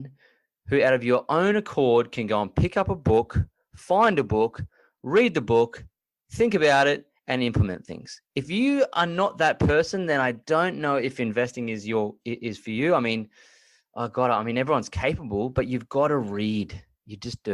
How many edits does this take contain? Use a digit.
0